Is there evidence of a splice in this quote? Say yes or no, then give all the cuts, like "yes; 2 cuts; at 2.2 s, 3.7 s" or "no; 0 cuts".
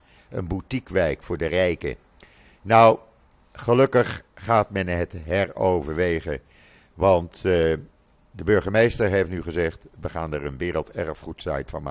no; 0 cuts